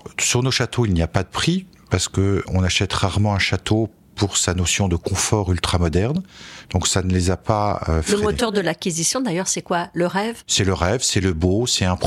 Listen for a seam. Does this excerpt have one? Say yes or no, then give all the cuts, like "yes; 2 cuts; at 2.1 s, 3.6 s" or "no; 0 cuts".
yes; 1 cut; at 6.6 s